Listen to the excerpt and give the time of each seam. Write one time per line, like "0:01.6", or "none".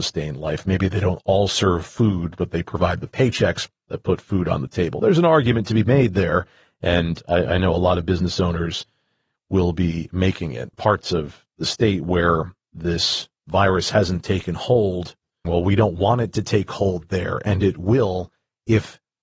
0:10.7
0:13.4
0:15.4